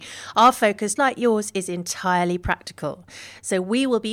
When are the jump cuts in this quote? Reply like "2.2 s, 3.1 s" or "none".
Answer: 1.0 s